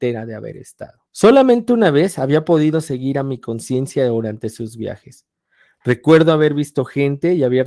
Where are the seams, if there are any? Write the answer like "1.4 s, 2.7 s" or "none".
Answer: 1.1 s